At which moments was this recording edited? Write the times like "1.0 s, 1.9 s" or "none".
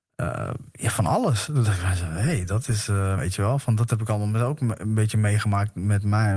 3.2 s